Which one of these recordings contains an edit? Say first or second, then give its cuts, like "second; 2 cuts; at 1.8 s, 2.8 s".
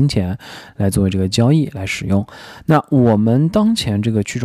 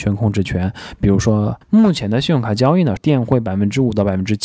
second; 2 cuts; at 1.6 s, 3.0 s